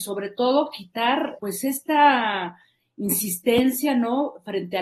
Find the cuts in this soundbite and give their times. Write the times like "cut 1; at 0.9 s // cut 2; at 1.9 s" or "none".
cut 1; at 1.4 s